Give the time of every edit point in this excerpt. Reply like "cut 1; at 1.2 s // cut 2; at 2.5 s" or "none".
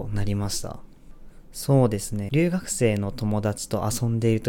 cut 1; at 2.3 s

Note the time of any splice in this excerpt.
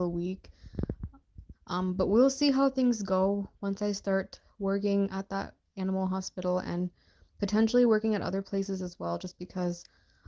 cut 1; at 1.5 s

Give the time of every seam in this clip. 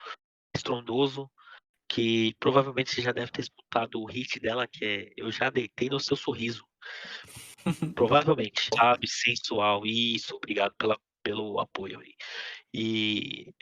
cut 1; at 8.7 s

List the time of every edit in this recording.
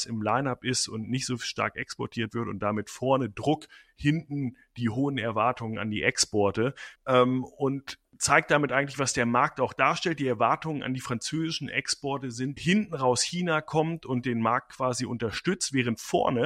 cut 1; at 6.9 s // cut 2; at 12.6 s

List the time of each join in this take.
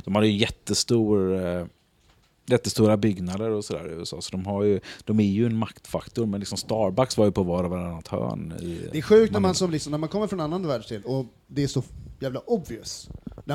none

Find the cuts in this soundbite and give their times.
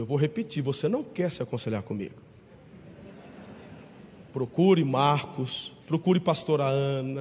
cut 1; at 5.8 s

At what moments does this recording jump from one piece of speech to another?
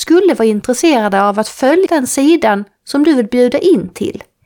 cut 1; at 1.9 s

